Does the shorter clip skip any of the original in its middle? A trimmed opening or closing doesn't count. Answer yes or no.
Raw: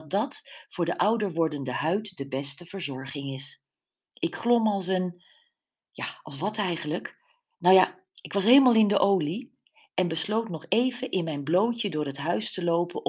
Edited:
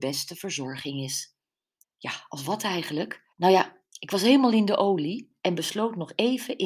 yes